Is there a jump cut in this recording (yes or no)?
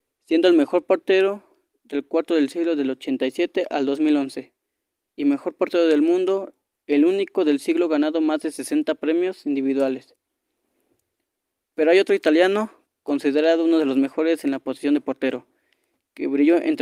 yes